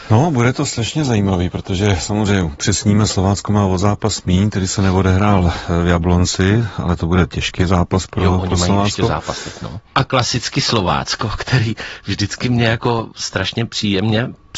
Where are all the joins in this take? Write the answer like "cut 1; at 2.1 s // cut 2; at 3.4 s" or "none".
cut 1; at 9.9 s